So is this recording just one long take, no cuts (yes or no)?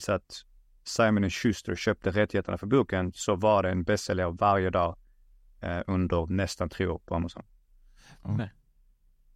no